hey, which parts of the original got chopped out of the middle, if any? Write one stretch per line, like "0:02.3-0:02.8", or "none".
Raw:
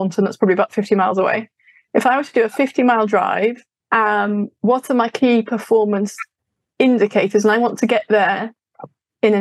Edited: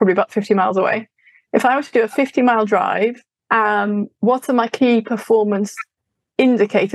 none

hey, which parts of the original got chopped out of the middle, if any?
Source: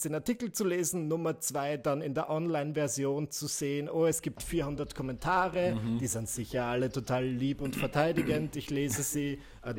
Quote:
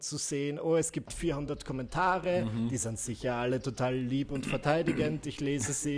none

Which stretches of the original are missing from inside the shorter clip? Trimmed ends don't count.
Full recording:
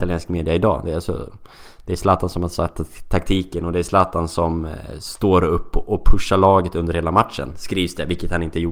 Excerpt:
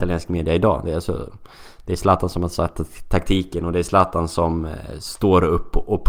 none

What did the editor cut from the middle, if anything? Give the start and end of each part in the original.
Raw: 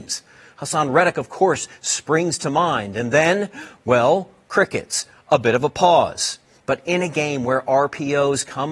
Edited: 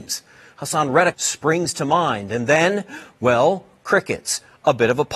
0:01.1-0:01.8

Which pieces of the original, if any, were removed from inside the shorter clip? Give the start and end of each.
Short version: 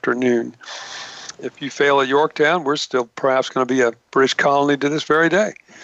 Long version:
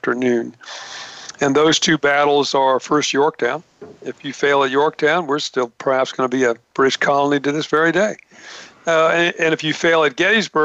0:01.3-0:04.0

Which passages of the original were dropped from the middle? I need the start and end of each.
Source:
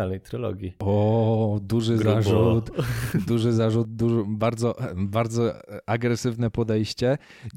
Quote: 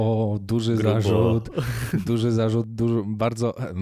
none

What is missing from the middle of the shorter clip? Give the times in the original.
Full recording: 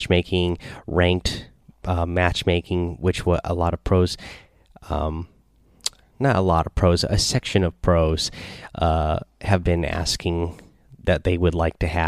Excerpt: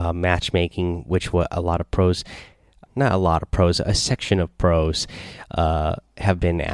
0:04.8-0:06.1

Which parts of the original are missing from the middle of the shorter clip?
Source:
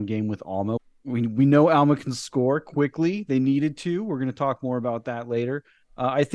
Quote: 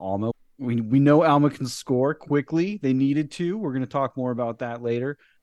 none

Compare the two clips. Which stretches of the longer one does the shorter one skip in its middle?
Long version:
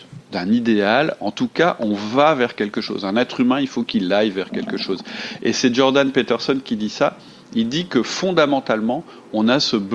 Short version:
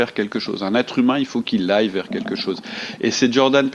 none

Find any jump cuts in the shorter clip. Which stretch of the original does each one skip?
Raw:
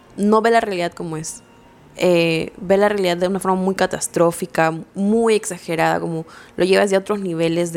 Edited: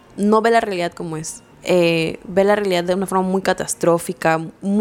0:01.5-0:01.8

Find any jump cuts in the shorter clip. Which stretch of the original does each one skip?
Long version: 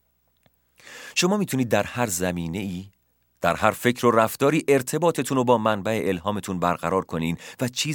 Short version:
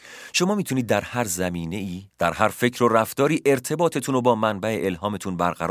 0:02.9-0:03.3

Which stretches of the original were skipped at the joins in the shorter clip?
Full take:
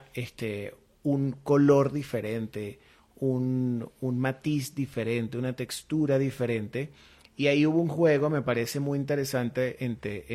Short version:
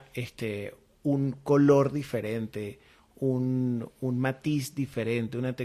none

